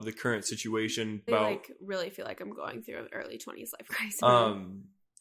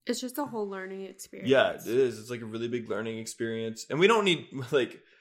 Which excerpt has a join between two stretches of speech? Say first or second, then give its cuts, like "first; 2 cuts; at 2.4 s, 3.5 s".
first; 2 cuts; at 1.3 s, 4.2 s